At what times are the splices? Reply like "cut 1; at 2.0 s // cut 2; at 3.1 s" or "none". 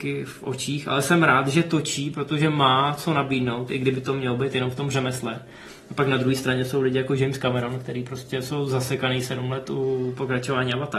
none